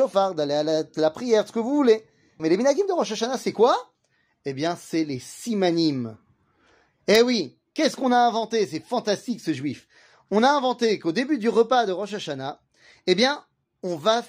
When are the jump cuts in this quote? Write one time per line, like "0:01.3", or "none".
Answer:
0:02.4